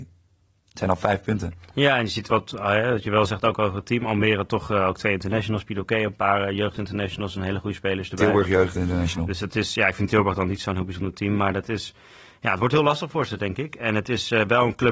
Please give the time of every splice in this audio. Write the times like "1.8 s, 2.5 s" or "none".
none